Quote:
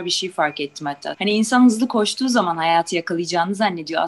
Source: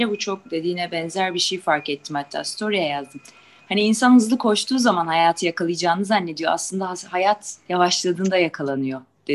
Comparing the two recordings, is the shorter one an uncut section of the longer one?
no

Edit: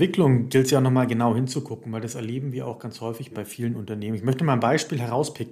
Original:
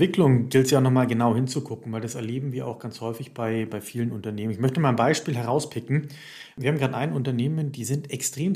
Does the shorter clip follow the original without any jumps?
no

